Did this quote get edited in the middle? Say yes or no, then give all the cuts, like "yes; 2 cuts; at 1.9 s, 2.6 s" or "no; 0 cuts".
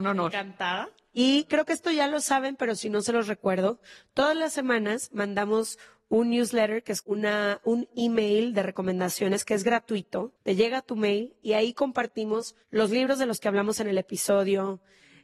yes; 2 cuts; at 10.4 s, 12.6 s